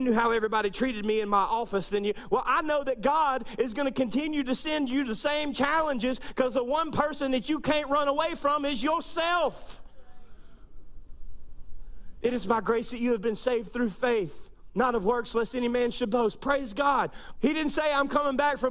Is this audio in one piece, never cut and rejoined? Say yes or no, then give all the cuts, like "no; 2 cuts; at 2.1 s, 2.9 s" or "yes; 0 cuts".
no; 2 cuts; at 12.2 s, 17.4 s